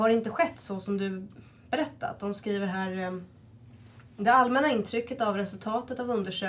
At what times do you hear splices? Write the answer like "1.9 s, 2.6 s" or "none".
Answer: none